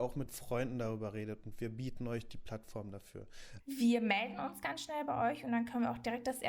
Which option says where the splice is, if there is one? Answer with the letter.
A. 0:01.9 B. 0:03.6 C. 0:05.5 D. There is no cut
B